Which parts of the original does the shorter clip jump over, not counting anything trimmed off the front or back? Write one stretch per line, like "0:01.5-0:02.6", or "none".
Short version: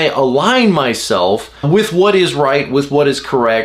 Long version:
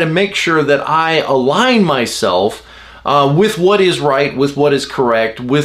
0:02.8-0:03.3

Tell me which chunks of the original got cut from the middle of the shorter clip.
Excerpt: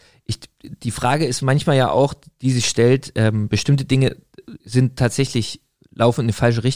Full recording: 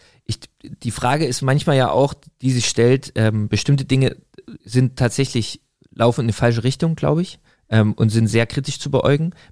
none

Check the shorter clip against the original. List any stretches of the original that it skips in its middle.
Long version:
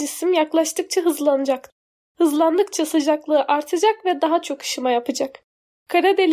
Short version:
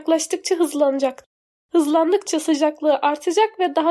none

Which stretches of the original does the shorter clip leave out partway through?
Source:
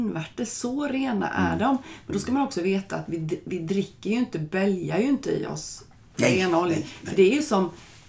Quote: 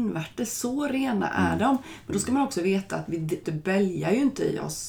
0:03.4-0:04.3

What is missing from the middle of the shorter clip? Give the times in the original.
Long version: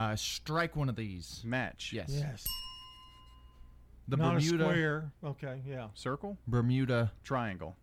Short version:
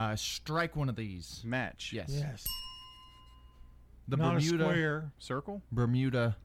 0:05.2-0:05.9

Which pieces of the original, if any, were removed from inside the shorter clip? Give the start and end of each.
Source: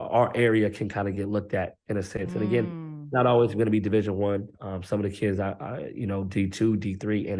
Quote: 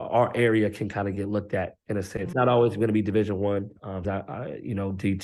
0:02.3-0:03.1
0:04.8-0:05.4

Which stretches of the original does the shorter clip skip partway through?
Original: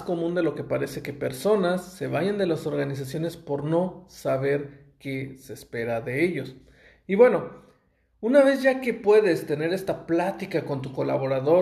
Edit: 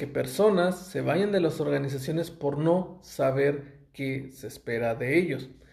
none

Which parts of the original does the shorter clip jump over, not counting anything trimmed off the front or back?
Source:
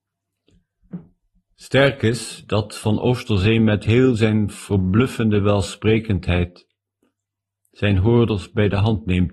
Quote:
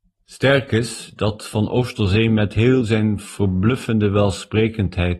none

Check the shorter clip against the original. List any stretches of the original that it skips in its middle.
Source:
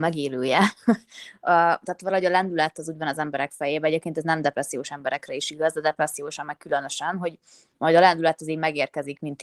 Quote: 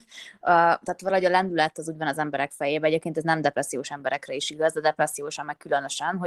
none

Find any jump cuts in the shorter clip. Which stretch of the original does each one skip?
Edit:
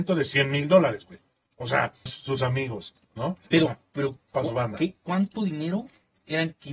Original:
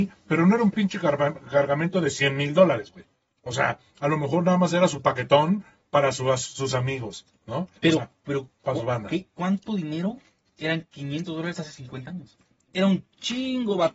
0:03.9-0:06.4

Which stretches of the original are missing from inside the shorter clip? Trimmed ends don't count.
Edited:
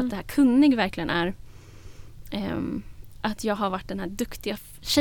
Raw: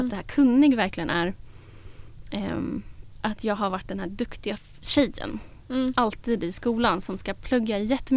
none

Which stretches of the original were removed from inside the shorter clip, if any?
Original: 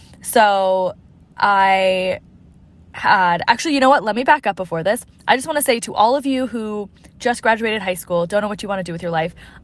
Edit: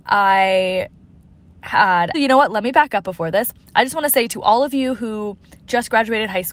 0:03.5-0:03.7

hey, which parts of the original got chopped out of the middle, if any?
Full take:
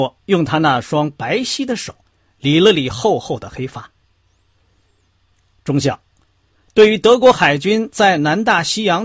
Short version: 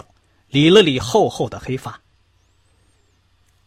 none

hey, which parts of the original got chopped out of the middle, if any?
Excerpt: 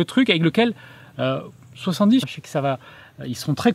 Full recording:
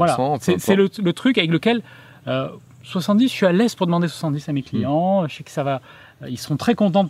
0:03.3-0:05.2

